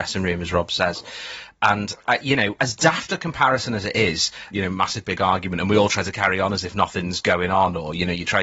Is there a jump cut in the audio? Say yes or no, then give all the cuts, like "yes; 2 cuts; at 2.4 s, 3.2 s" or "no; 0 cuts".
yes; 2 cuts; at 2.6 s, 4.5 s